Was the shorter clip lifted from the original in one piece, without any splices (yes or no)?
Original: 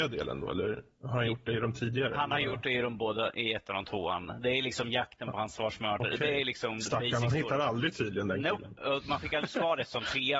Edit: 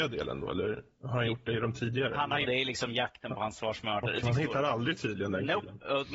no